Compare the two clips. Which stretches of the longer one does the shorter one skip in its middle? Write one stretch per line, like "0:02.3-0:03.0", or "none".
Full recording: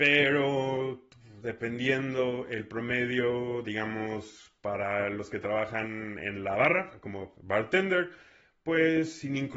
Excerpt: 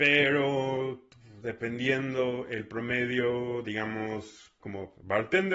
0:04.6-0:07.0